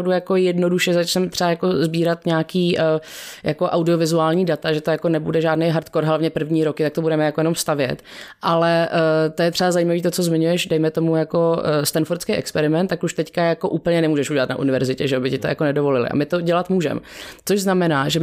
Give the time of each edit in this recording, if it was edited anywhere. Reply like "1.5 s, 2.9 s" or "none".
none